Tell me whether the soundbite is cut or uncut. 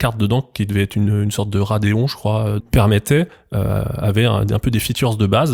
cut